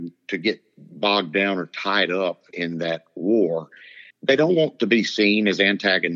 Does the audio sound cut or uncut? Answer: cut